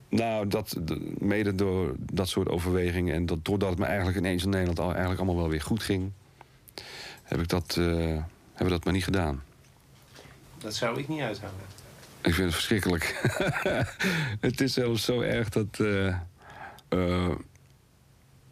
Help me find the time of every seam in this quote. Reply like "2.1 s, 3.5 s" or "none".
10.4 s, 16.9 s